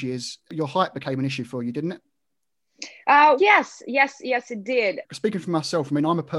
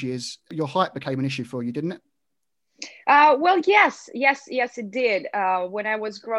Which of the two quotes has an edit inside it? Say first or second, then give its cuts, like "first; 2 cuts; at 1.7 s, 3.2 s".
first; 2 cuts; at 3.4 s, 5.0 s